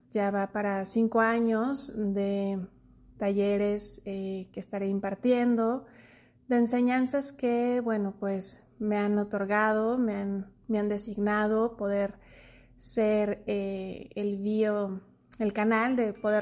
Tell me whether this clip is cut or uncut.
uncut